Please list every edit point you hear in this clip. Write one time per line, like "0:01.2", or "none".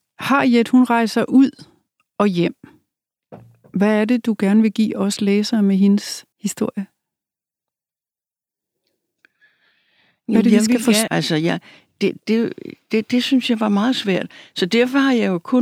0:06.3
0:11.1